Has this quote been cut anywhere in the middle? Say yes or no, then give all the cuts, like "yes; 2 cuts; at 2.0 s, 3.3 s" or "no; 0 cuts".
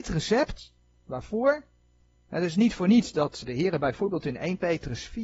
yes; 1 cut; at 2.1 s